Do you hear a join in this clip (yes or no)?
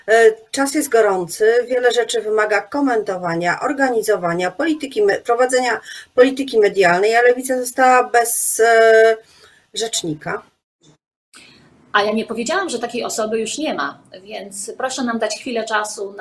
no